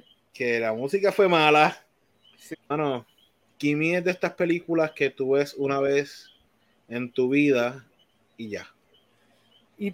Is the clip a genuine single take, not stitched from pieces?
no; 1 cut; at 2.5 s

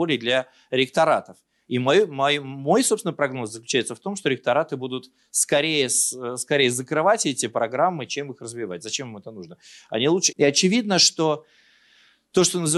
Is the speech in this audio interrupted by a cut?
yes; 1 cut; at 10.3 s

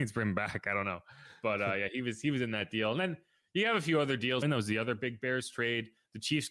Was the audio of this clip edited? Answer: yes; 1 cut; at 4.4 s

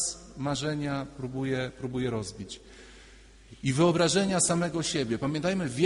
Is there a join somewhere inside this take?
no; 0 cuts

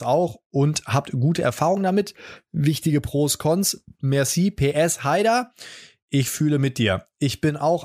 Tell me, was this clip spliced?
no; 0 cuts

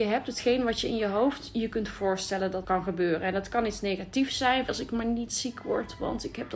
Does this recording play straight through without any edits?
no; 2 cuts; at 2.6 s, 4.7 s

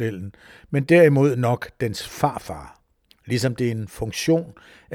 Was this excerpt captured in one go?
no; 1 cut; at 3.1 s

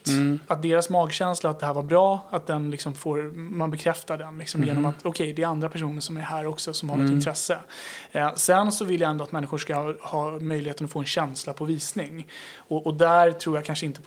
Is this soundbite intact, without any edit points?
no; 1 cut; at 10.0 s

